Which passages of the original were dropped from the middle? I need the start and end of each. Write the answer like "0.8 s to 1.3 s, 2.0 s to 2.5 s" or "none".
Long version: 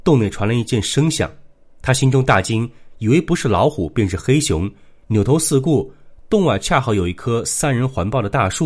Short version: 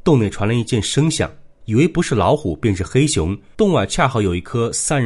1.6 s to 2.9 s, 4.9 s to 6.3 s